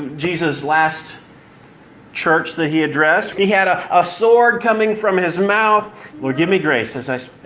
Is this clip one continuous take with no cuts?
no; 2 cuts; at 3.3 s, 6.1 s

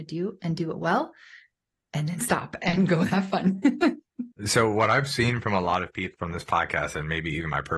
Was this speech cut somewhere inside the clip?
yes; 2 cuts; at 4.3 s, 6.1 s

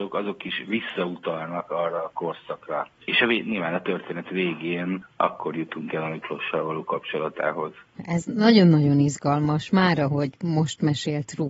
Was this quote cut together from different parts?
no; 0 cuts

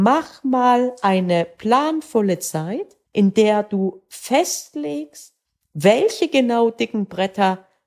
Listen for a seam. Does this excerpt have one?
yes; 1 cut; at 3.1 s

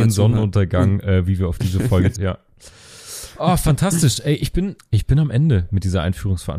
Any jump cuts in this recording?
yes; 2 cuts; at 2.2 s, 4.8 s

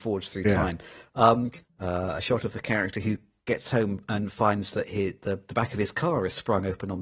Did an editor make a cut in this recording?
yes; 1 cut; at 1.6 s

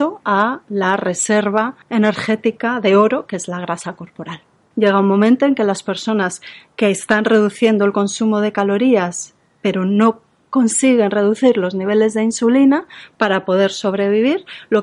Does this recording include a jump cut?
yes; 2 cuts; at 1.8 s, 4.7 s

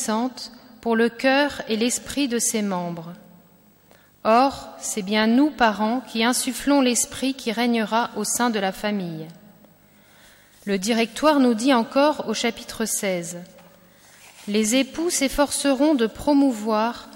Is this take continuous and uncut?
yes; 0 cuts

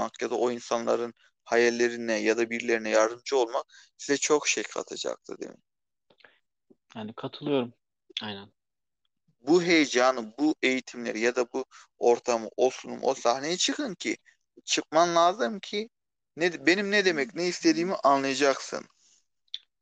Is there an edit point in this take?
yes; 1 cut; at 8.1 s

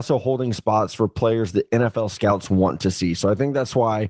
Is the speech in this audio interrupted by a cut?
no; 0 cuts

